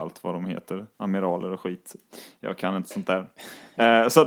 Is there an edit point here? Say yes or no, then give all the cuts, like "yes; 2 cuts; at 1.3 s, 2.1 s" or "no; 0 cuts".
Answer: yes; 1 cut; at 0.9 s